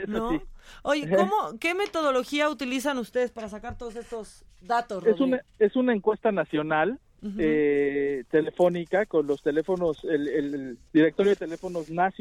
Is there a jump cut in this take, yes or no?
yes